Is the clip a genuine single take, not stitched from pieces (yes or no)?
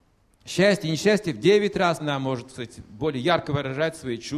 no